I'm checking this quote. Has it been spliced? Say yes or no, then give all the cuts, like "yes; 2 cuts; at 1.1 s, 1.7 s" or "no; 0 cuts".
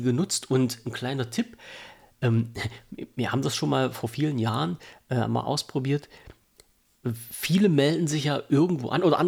no; 0 cuts